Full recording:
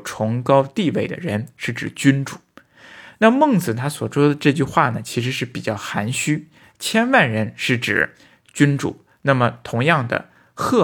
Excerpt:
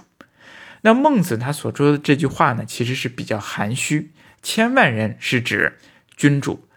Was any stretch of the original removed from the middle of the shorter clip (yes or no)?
no